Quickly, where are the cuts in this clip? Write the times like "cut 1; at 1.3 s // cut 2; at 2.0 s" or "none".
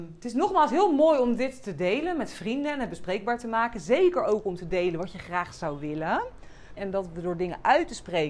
cut 1; at 6.8 s